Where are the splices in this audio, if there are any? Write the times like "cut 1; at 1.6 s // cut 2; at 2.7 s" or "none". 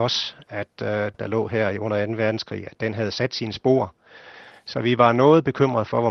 cut 1; at 1.1 s